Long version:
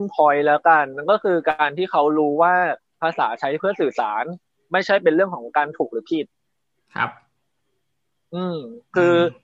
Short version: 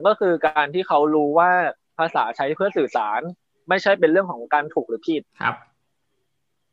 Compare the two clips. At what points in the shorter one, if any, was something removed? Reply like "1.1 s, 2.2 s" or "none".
5.3 s